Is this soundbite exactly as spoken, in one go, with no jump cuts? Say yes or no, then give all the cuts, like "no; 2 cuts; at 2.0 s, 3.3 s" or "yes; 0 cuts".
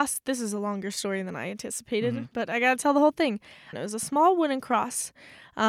no; 1 cut; at 3.7 s